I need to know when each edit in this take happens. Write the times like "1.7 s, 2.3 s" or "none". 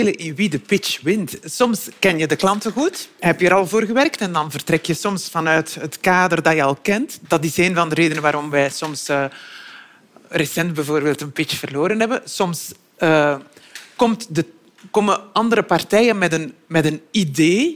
none